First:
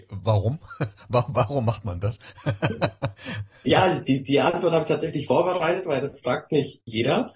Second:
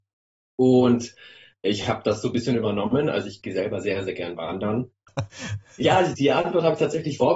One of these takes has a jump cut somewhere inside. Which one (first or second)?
second